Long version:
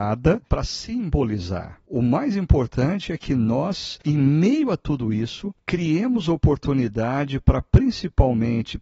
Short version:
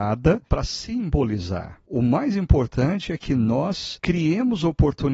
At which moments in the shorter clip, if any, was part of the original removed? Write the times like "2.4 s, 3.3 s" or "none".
4.0 s